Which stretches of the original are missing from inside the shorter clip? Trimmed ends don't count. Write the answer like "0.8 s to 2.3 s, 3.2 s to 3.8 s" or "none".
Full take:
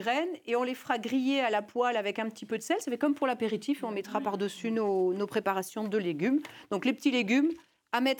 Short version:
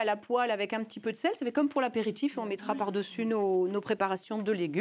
none

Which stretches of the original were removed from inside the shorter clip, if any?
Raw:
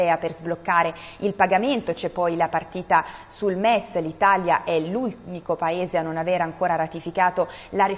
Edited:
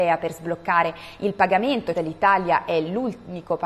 1.9 s to 3.9 s

